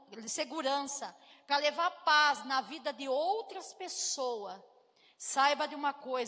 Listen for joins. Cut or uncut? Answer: uncut